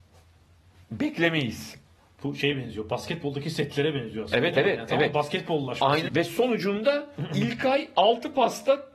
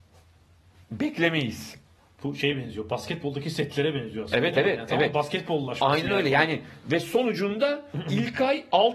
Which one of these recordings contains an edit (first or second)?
first